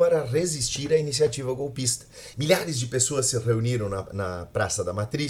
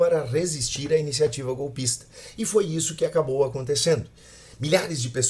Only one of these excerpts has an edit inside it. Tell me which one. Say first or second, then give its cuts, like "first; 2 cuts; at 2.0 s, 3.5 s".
first; 1 cut; at 2.3 s